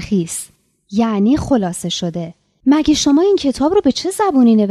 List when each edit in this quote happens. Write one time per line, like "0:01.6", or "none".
0:02.6